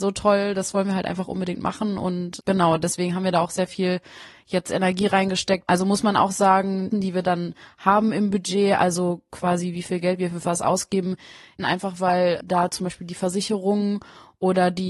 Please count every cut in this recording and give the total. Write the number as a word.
two